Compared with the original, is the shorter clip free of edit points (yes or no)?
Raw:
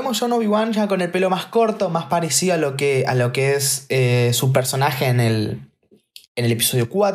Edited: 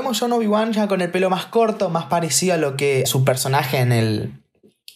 no